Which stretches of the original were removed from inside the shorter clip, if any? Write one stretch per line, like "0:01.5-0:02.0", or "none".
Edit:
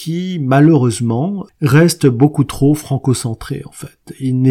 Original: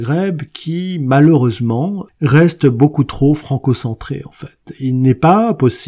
none